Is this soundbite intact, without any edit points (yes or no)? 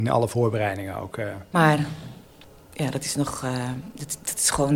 no